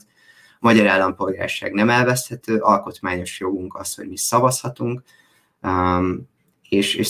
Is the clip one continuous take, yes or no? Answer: yes